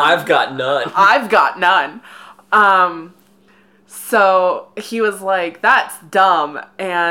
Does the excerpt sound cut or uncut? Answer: uncut